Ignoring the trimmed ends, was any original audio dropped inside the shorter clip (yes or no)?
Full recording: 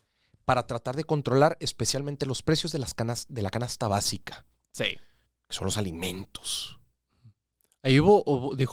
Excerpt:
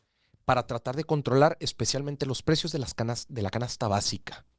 no